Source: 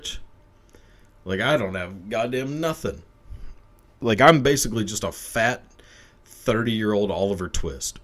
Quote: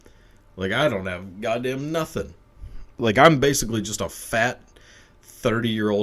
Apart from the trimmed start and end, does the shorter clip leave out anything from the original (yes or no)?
yes